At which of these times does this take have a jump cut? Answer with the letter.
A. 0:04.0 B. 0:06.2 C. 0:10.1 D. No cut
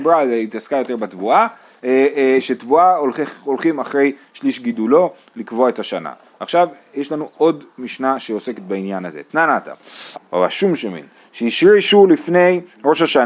C